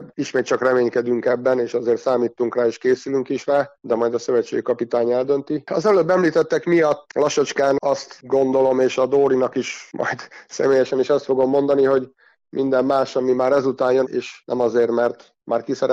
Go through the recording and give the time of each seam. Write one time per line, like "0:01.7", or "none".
0:14.0